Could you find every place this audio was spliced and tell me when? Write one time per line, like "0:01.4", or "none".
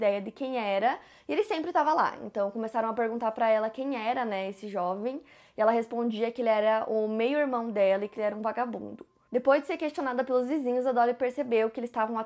none